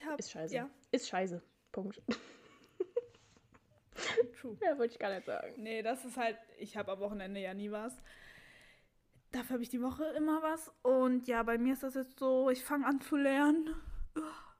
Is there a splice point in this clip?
no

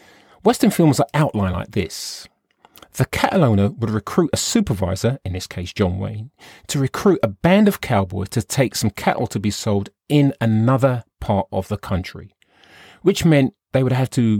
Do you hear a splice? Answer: no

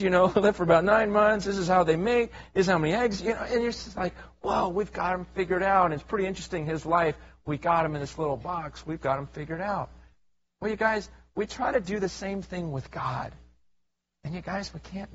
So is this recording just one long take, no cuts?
yes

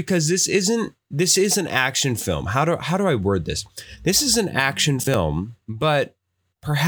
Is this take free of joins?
no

